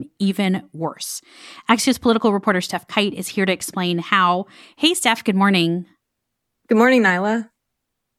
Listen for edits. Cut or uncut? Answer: uncut